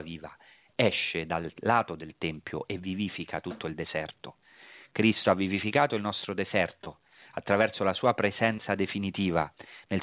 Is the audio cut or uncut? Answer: uncut